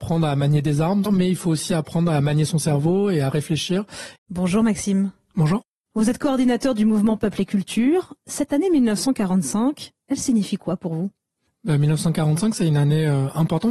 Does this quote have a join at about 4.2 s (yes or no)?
yes